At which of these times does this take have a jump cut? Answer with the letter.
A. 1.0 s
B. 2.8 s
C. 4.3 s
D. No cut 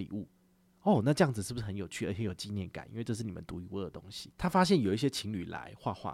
C